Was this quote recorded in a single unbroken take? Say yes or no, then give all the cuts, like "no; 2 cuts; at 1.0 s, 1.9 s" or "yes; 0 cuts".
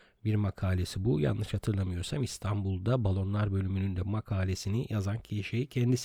yes; 0 cuts